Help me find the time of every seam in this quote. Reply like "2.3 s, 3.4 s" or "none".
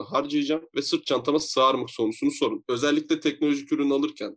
none